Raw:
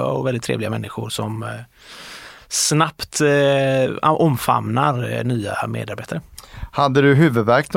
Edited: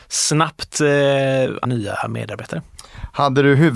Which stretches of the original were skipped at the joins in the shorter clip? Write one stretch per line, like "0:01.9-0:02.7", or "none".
0:04.0-0:05.2